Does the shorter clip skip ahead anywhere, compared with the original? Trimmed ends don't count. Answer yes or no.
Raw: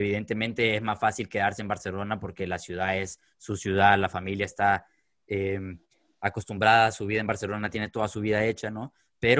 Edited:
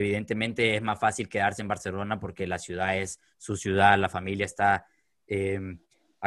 no